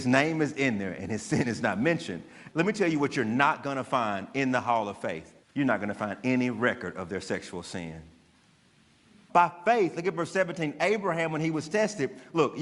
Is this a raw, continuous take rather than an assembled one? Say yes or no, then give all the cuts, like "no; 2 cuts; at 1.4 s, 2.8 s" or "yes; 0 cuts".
no; 3 cuts; at 2.5 s, 5.4 s, 9.3 s